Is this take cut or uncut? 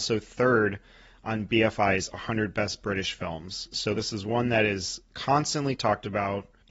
uncut